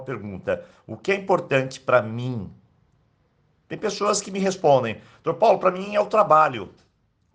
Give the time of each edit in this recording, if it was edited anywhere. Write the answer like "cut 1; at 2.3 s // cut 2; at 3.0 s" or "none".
none